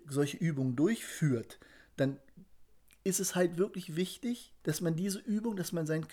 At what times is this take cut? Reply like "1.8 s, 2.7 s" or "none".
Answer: 4.6 s